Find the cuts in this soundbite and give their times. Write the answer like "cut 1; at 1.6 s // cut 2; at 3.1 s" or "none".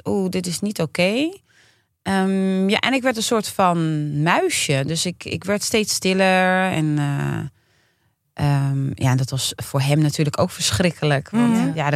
none